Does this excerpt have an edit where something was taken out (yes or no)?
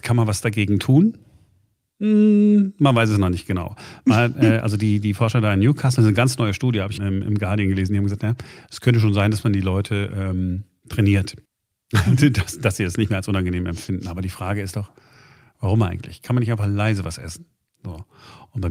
yes